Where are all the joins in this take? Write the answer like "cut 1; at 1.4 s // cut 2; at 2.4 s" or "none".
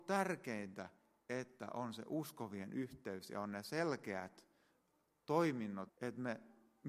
cut 1; at 5.9 s

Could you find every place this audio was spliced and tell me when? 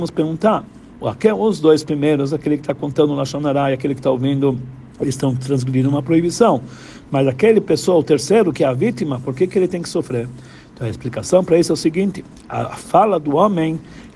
cut 1; at 4.9 s

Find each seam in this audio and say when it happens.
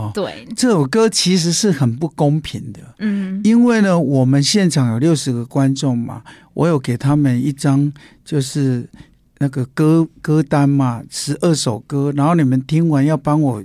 none

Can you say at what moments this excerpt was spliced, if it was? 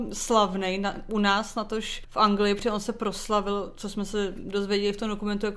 cut 1; at 2.0 s

